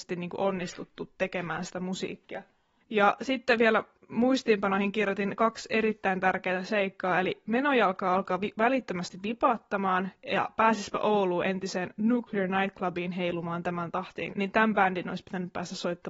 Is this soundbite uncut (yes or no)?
no